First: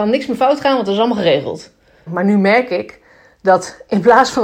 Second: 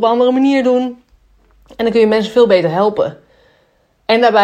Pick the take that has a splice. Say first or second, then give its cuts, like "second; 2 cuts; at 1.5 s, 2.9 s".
first; 1 cut; at 2.1 s